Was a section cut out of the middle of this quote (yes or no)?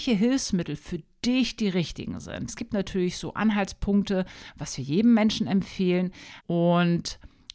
yes